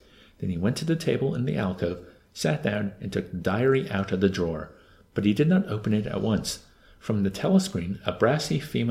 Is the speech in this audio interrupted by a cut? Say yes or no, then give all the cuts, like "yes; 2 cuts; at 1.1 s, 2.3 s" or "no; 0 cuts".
no; 0 cuts